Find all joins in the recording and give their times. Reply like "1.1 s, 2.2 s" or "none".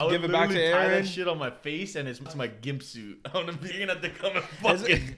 2.3 s, 3.7 s